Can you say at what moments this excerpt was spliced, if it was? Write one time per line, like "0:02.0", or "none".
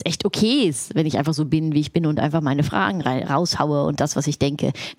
none